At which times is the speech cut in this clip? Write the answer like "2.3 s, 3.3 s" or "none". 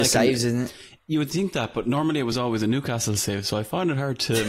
none